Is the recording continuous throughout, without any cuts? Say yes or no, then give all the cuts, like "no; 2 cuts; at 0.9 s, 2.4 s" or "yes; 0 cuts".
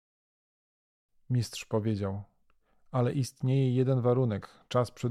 yes; 0 cuts